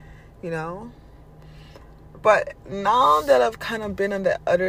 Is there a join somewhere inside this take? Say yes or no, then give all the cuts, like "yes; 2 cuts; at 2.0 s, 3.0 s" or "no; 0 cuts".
no; 0 cuts